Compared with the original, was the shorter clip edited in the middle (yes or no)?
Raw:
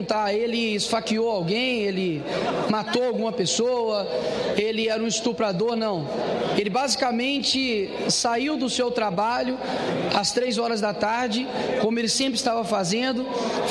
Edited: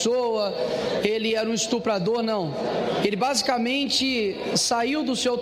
no